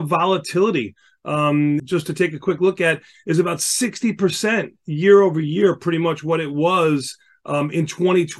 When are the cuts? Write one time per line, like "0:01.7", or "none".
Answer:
0:01.8